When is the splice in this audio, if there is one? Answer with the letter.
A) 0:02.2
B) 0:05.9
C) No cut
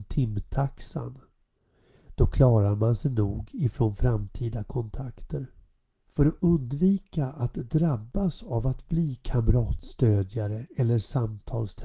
B